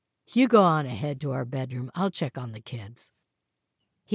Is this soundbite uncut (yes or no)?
yes